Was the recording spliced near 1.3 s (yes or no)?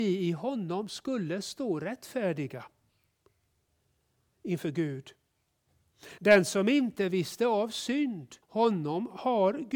no